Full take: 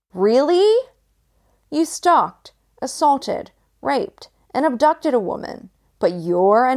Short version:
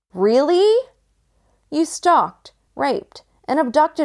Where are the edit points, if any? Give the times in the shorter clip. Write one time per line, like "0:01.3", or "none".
0:02.7